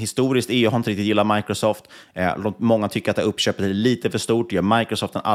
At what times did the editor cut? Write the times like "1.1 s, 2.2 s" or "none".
none